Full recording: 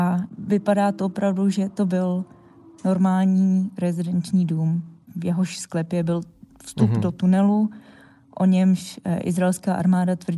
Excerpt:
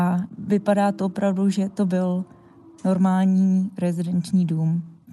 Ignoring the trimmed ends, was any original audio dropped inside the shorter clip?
no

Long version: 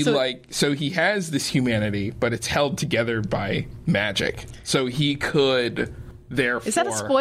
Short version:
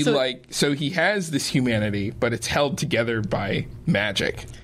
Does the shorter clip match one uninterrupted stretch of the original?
yes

